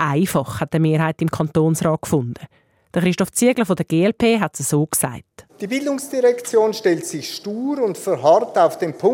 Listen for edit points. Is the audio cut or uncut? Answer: uncut